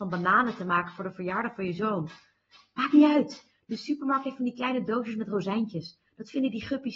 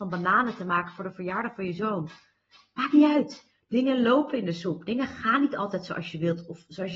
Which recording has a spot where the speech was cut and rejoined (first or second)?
second